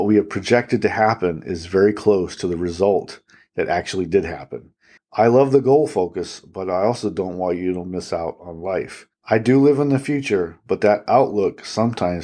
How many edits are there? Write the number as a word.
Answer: one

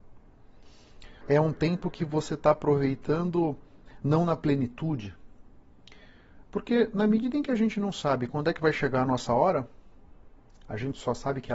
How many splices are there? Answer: two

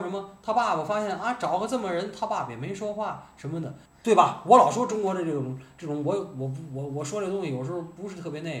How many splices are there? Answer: one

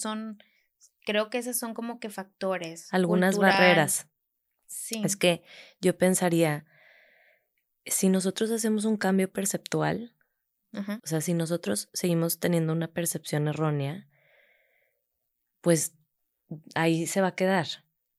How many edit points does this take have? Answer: one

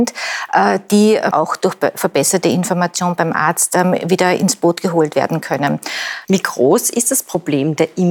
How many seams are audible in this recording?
two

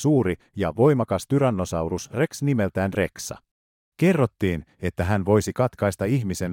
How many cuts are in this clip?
one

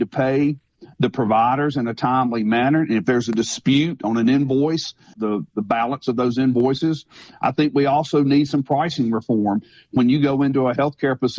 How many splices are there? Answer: one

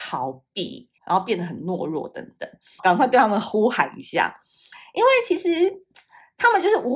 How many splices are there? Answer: two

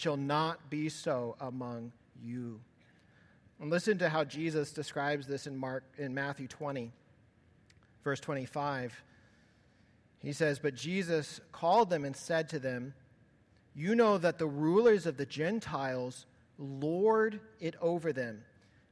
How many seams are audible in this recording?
one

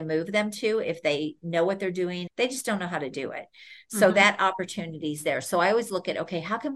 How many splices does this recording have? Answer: one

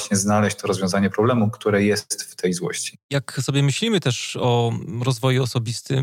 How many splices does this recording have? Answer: zero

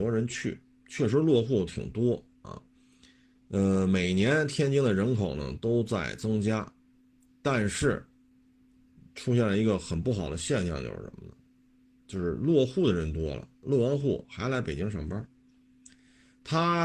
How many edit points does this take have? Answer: zero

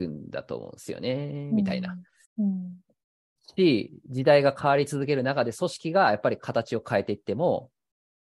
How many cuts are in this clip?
one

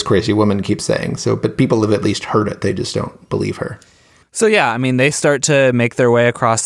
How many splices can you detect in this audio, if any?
zero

